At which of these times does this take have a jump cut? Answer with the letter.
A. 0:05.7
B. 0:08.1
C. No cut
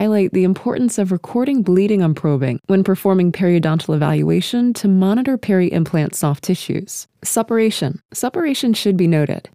C